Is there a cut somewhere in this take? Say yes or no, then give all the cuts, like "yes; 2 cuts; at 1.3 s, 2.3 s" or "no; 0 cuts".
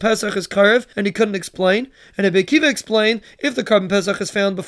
yes; 1 cut; at 0.9 s